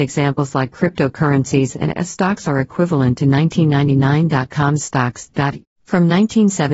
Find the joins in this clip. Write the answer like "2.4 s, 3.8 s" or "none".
5.6 s